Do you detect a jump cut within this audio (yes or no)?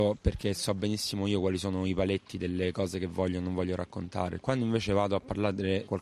no